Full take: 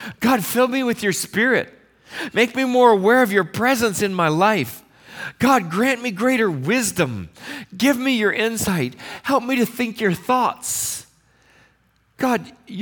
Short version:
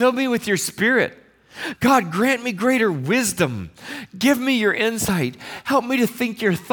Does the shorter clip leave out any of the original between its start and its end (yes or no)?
yes